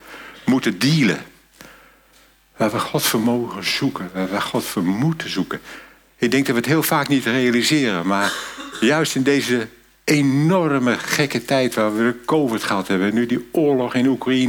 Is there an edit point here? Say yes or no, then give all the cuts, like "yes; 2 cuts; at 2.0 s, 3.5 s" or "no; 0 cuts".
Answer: no; 0 cuts